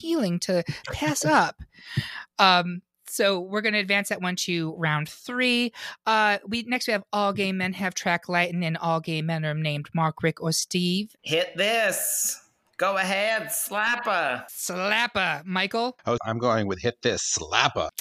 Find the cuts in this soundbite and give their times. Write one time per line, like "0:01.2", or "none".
0:11.2
0:16.2